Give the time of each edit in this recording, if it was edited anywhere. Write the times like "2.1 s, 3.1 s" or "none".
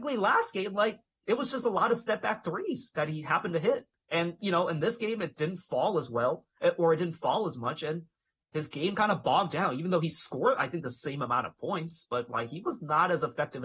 none